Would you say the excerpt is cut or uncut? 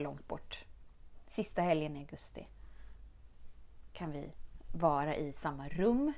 uncut